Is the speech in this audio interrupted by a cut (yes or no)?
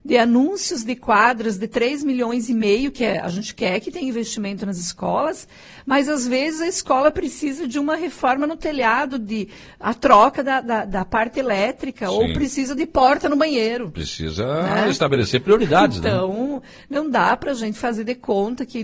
no